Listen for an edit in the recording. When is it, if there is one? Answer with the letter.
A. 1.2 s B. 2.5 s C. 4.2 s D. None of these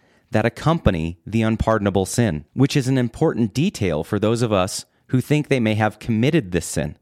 B